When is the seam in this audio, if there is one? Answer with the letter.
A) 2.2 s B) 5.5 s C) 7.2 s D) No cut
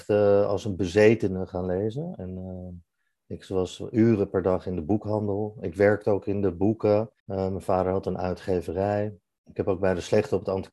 C